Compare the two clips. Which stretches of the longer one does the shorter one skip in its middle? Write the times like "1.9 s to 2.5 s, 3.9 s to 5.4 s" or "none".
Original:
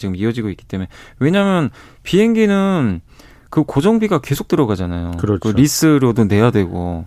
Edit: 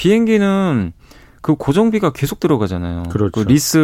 none